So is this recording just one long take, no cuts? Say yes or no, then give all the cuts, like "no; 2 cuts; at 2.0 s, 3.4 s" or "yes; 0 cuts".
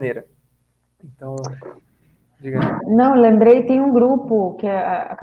no; 1 cut; at 2.8 s